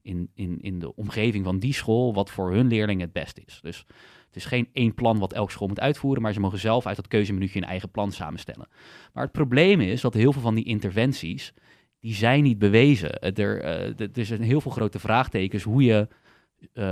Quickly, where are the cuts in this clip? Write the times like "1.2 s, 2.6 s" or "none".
none